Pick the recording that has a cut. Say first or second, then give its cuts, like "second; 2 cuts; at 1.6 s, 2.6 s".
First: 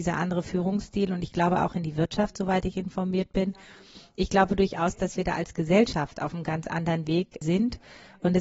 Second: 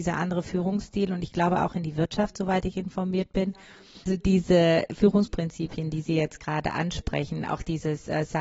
second; 1 cut; at 4.0 s